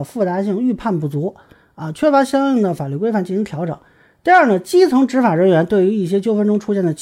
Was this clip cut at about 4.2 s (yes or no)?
no